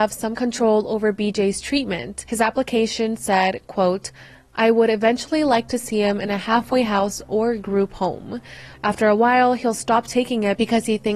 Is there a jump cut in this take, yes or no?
yes